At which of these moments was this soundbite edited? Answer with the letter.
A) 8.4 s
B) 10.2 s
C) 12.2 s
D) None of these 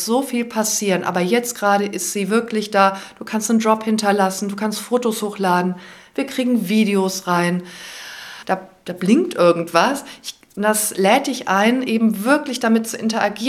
A